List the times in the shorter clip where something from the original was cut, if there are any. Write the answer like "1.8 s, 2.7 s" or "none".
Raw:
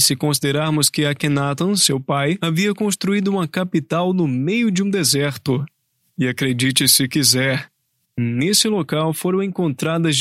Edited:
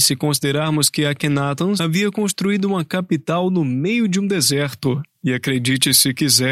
1.8 s, 5.1 s